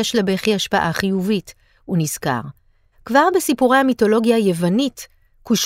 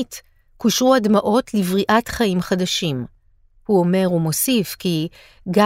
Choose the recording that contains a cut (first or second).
first